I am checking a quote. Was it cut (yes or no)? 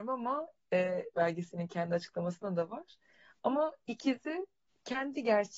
yes